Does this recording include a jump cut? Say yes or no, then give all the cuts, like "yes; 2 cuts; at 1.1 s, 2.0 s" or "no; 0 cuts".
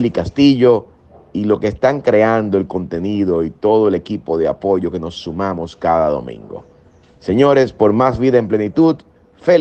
no; 0 cuts